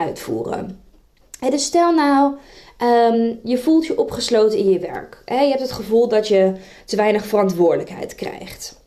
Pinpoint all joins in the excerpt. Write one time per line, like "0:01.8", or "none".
none